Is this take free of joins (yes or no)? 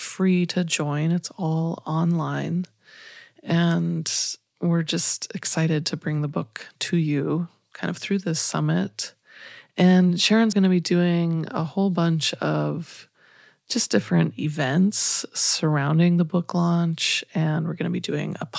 no